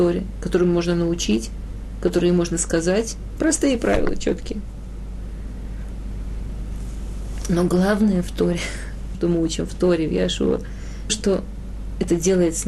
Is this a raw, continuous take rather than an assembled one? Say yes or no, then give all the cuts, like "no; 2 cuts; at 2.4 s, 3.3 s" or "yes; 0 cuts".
no; 3 cuts; at 3.4 s, 9.1 s, 11.1 s